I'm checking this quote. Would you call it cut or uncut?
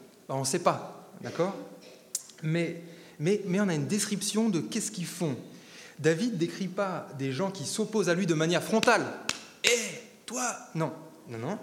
uncut